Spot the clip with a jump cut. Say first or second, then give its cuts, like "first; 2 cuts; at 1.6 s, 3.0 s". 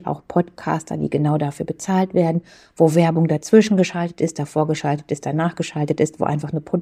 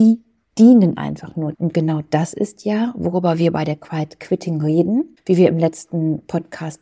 second; 1 cut; at 1.5 s